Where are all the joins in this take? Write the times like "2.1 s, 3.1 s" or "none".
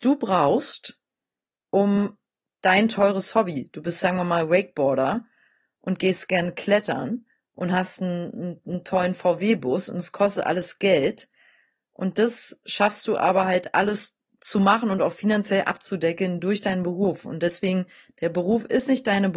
none